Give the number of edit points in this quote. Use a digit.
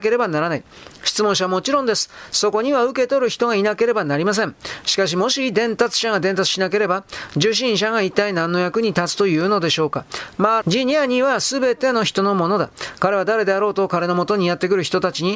1